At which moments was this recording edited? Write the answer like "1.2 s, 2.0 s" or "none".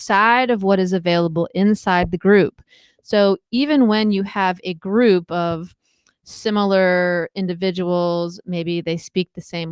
none